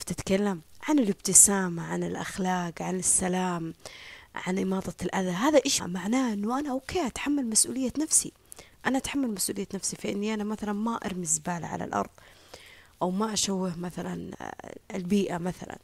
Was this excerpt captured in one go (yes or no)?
no